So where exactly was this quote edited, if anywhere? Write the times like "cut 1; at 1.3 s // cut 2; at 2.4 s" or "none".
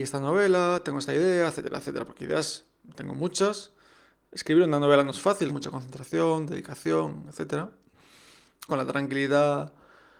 cut 1; at 5.5 s // cut 2; at 8.7 s

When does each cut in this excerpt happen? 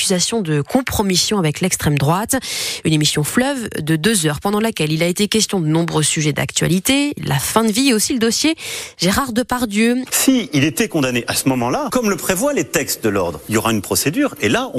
cut 1; at 7.2 s // cut 2; at 10.1 s

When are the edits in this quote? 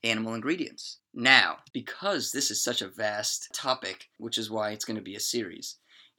cut 1; at 4.2 s

